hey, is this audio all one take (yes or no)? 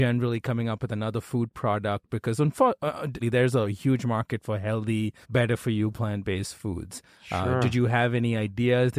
no